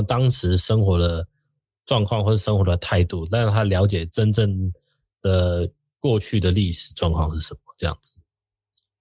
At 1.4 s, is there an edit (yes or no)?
no